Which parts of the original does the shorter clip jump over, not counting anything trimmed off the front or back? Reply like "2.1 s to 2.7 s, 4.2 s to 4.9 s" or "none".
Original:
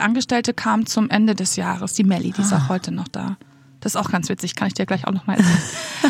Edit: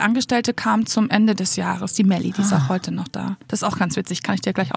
3.4 s to 3.8 s